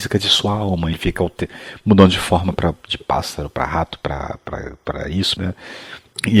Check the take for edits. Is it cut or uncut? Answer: cut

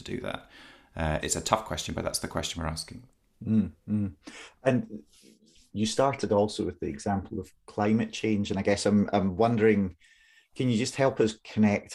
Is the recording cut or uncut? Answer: cut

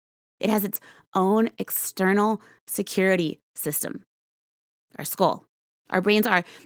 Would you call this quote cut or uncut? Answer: uncut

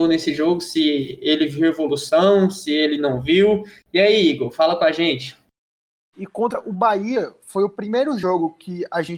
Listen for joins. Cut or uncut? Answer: cut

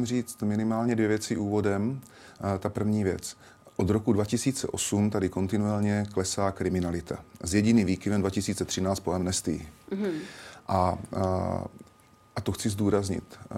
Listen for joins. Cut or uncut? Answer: uncut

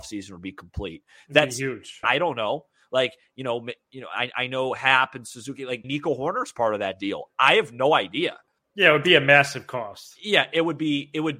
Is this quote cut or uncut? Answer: cut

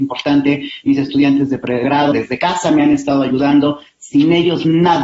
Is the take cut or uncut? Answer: cut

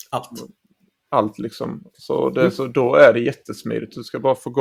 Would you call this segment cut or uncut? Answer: uncut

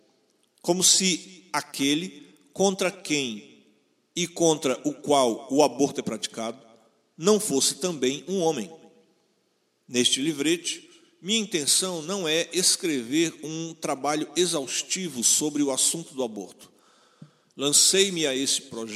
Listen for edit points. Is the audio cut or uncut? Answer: uncut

